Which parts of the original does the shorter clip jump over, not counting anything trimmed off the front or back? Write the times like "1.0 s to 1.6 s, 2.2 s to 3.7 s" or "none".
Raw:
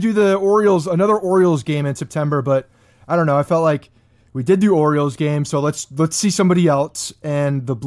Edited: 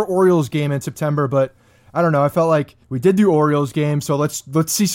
4.0 s to 4.3 s